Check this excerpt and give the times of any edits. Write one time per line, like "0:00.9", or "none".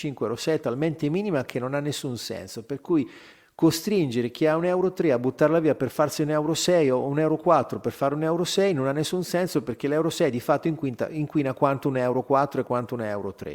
none